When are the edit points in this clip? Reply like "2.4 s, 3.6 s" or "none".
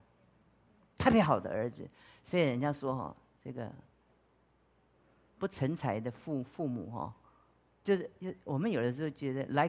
7.9 s